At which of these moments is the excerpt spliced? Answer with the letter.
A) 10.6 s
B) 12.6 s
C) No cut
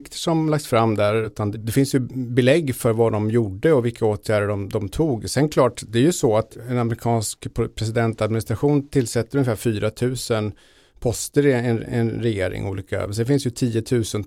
C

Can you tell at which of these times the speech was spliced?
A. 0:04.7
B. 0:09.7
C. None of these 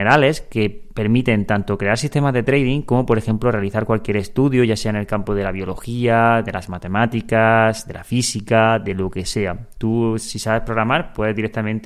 C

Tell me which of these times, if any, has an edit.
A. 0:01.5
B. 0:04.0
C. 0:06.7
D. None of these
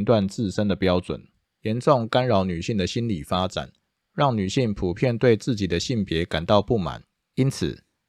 A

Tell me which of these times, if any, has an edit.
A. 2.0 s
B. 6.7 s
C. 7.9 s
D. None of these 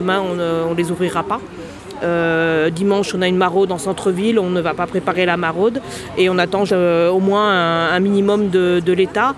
B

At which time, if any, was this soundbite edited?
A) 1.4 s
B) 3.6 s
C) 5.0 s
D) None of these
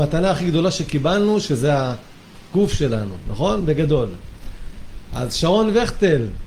D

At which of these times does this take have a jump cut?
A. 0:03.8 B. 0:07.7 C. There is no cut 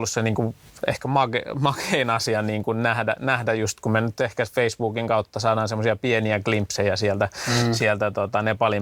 C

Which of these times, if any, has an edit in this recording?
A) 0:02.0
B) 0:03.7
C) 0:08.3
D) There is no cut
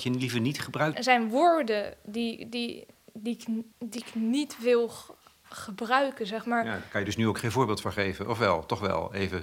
B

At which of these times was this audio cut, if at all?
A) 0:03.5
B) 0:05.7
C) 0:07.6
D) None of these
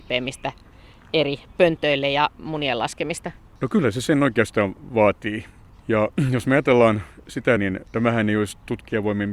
C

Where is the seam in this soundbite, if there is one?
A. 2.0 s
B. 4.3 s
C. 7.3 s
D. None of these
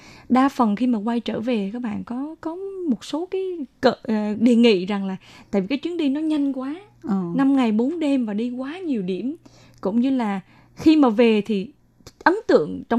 B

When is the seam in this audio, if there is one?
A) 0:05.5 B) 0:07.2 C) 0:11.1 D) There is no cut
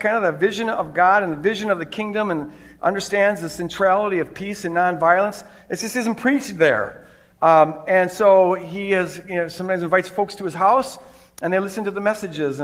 D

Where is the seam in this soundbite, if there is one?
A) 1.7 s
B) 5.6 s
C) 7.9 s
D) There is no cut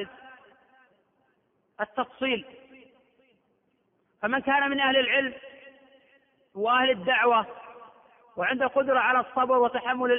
D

